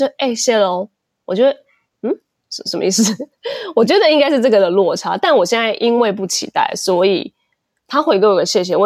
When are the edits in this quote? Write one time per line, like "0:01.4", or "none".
none